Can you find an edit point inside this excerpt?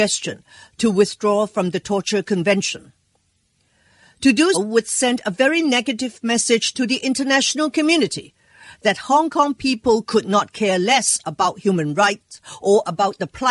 yes; 1 cut; at 4.5 s

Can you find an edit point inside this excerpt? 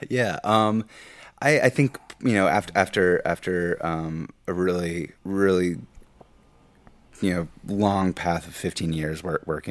yes; 2 cuts; at 5.2 s, 7.6 s

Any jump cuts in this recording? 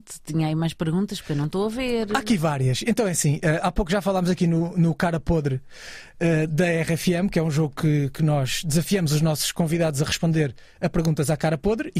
no; 0 cuts

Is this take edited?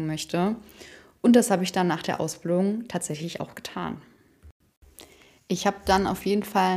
no; 0 cuts

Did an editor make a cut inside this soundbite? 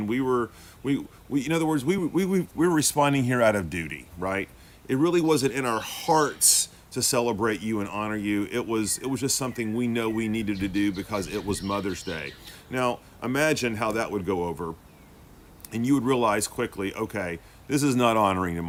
no; 0 cuts

